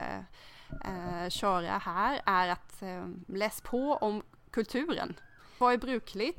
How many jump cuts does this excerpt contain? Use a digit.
0